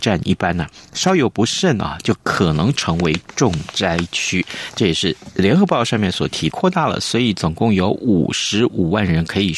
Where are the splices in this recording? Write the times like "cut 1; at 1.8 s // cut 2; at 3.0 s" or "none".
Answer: cut 1; at 6.5 s

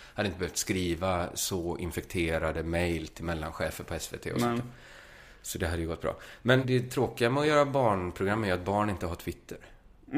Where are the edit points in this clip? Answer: cut 1; at 6.6 s

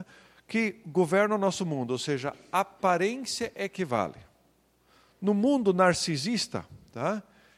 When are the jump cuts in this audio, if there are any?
none

